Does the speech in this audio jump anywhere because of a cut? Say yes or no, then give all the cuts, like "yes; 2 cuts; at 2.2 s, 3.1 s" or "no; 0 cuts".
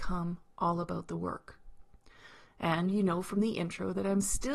yes; 1 cut; at 2.4 s